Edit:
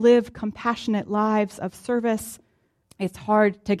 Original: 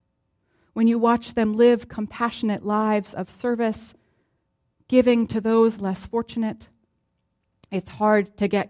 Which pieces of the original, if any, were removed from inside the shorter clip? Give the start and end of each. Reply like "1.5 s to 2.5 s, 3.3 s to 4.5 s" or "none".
4.4 s to 7.6 s

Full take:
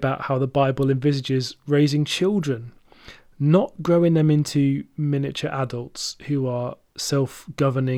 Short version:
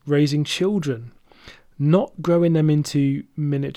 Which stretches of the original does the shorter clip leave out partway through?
none

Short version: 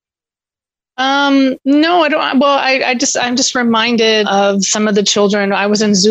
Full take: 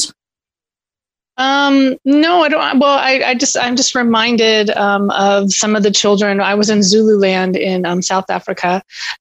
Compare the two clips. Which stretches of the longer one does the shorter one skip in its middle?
4.6 s to 5.1 s

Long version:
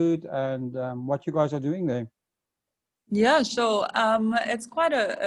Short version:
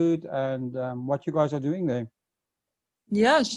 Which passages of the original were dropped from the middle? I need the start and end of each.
none

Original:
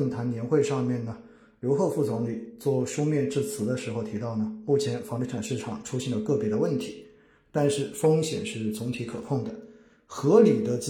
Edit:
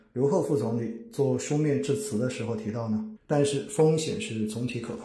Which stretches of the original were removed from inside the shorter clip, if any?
4.6 s to 7.4 s

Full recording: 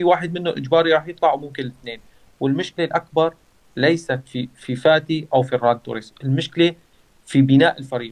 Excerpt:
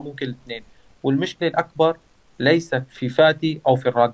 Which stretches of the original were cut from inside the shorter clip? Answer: 4.2 s to 4.5 s

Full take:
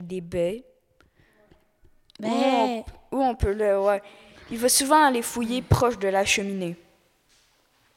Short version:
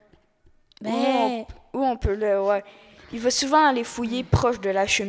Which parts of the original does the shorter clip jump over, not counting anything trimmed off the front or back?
none

